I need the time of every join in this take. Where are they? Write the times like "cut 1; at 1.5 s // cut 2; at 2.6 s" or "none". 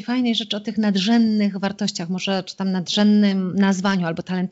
none